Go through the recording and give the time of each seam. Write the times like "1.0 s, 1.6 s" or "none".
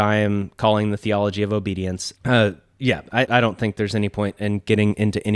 2.2 s, 3.2 s